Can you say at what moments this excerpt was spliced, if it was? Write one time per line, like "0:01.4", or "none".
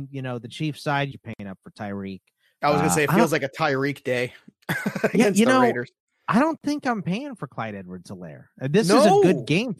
0:01.1